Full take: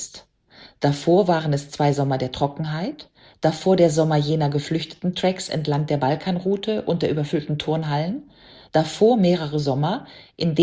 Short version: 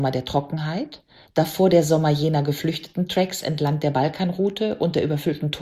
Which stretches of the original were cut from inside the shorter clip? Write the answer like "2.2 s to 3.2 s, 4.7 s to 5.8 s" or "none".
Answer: none

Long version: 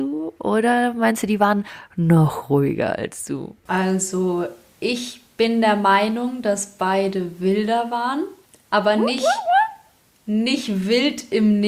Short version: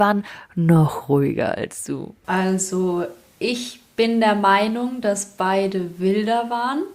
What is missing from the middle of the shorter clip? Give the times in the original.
none

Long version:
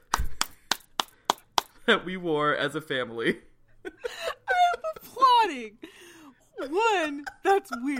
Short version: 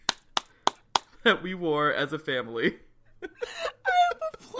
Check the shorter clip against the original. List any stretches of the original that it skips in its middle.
none

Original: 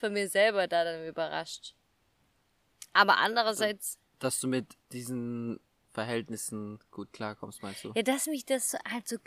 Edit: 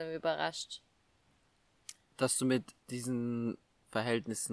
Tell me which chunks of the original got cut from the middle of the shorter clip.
2.9 s to 4.0 s

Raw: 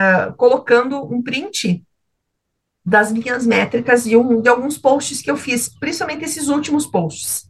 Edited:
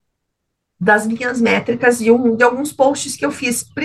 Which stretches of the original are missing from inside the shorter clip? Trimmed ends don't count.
none

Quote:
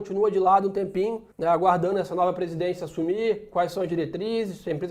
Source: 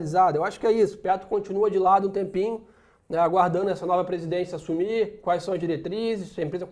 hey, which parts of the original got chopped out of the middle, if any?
2.7 s to 3.0 s

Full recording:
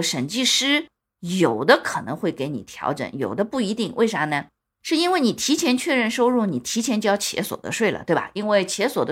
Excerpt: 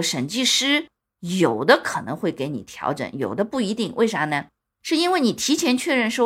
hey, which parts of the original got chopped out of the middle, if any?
none

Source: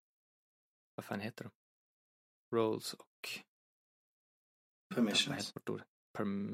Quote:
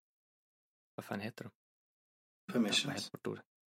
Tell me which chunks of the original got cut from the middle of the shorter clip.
2.3 s to 4.7 s

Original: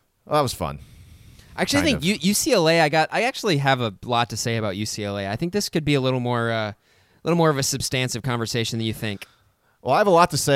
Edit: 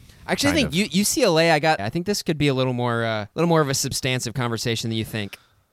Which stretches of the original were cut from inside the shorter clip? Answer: 3.1 s to 5.2 s, 6.8 s to 7.2 s

